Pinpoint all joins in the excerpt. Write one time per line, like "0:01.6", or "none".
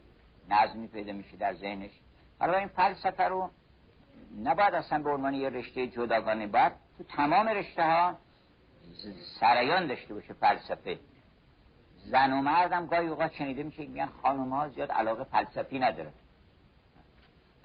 none